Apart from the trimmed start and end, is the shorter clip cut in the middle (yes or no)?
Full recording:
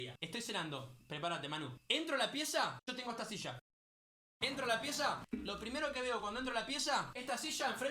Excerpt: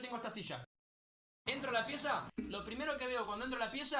no